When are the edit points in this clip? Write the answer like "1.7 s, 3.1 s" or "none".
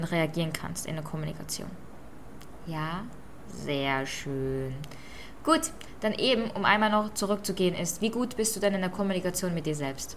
none